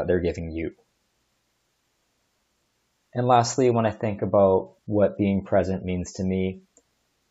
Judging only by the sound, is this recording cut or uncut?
cut